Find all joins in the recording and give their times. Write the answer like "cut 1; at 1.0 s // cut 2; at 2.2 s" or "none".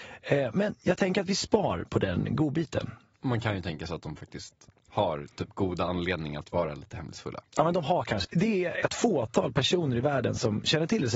cut 1; at 8.2 s